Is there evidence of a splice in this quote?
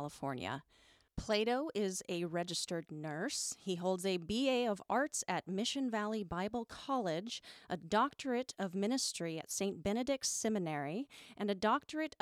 no; 0 cuts

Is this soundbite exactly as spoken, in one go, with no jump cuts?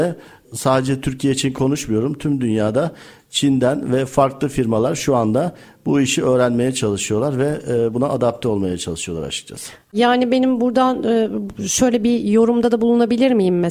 yes; 0 cuts

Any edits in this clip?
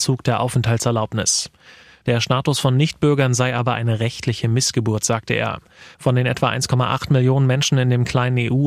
yes; 2 cuts; at 2.0 s, 5.9 s

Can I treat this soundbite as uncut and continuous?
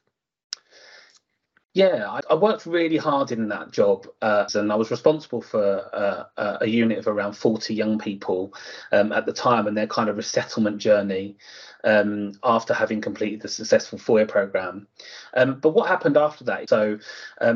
no; 2 cuts; at 4.5 s, 16.7 s

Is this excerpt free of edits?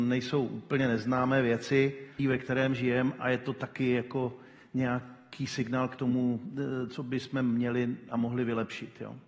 no; 1 cut; at 2.2 s

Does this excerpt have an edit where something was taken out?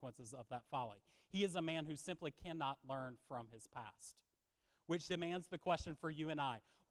yes; 1 cut; at 5.1 s

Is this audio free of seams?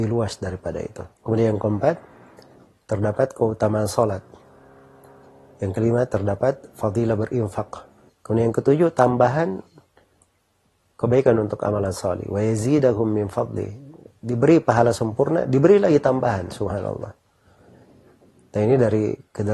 no; 2 cuts; at 1.1 s, 8.1 s

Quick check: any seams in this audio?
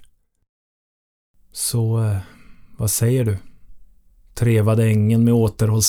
no; 0 cuts

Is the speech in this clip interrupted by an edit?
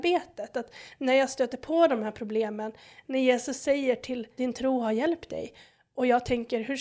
yes; 1 cut; at 4.4 s

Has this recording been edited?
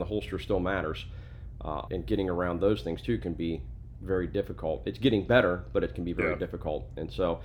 yes; 1 cut; at 1.9 s

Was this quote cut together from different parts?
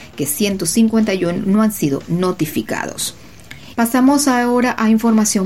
yes; 1 cut; at 3.7 s

